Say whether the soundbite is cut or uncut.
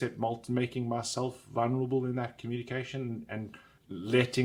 uncut